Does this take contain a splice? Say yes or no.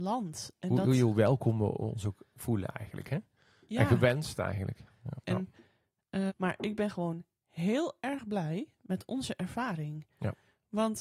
yes